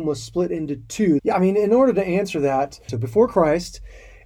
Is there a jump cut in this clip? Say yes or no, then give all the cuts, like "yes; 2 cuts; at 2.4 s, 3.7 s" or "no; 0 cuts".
yes; 2 cuts; at 1.2 s, 2.9 s